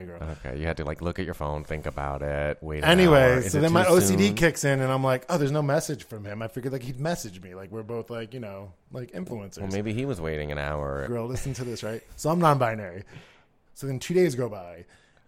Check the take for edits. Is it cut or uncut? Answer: cut